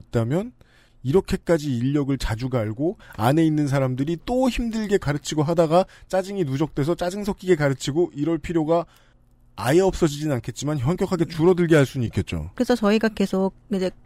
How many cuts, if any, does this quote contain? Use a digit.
2